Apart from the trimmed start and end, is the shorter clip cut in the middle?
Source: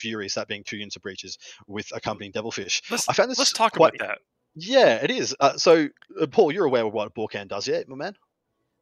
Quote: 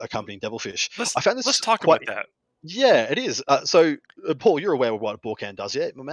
no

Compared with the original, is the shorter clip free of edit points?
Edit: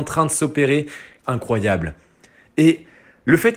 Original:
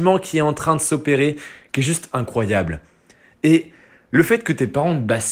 no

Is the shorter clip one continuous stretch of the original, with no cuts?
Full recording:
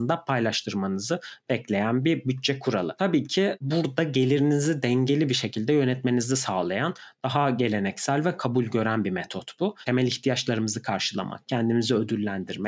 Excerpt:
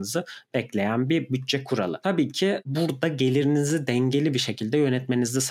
yes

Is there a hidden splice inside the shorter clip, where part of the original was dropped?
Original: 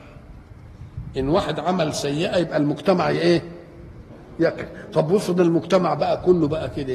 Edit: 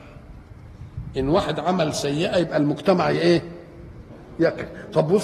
no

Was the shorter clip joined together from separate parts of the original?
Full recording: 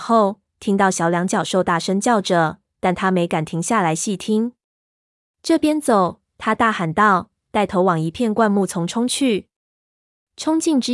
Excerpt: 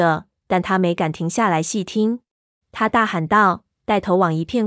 yes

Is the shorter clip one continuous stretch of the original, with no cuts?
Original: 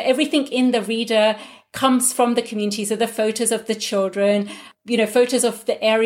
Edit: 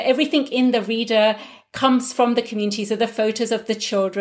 yes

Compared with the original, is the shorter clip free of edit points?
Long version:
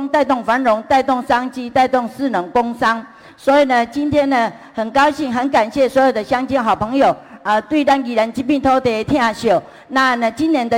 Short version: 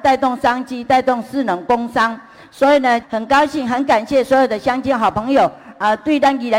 no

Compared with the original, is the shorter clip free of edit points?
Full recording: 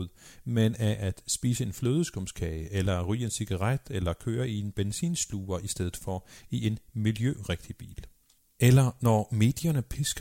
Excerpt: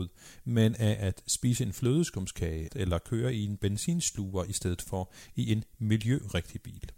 no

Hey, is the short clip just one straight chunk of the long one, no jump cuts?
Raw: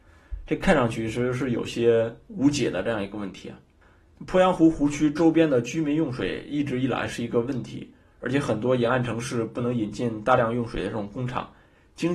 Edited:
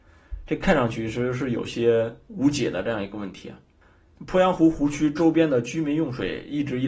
yes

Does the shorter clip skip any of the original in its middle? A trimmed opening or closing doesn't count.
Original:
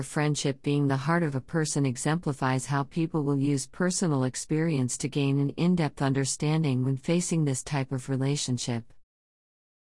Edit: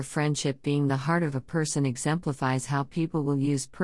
no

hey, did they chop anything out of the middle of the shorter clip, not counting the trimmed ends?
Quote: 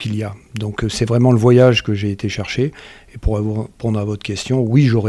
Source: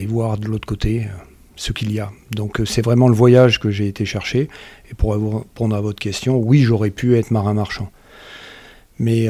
no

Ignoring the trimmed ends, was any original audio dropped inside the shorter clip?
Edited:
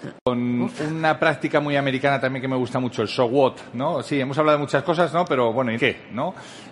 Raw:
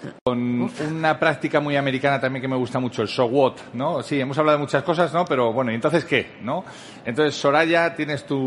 yes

